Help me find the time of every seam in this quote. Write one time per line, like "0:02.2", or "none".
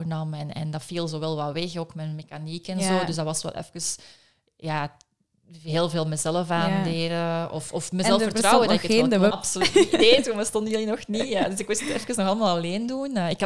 0:09.3